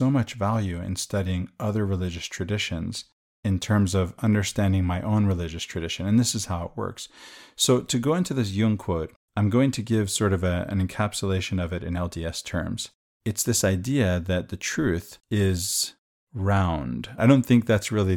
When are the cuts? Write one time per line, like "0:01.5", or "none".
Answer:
0:15.2
0:17.2